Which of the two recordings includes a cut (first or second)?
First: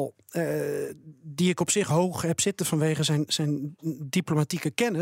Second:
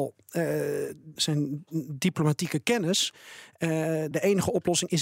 second